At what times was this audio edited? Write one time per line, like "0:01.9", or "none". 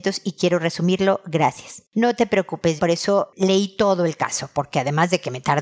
0:02.8